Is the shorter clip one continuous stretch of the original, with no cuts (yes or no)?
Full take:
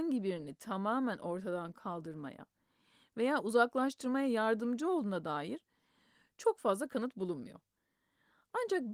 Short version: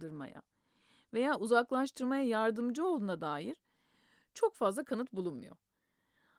yes